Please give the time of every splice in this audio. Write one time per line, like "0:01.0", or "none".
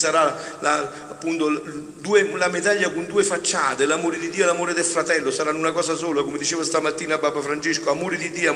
none